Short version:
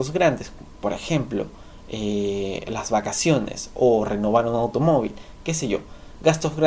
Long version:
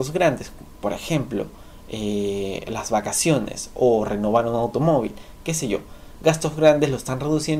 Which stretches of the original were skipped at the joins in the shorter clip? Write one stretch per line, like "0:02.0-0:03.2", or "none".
none